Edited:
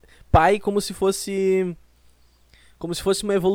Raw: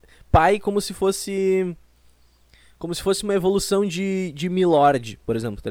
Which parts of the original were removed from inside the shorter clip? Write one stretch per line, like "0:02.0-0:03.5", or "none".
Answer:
none